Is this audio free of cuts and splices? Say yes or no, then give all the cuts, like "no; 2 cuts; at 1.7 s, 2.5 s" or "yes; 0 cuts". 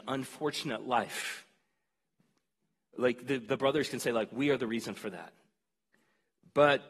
yes; 0 cuts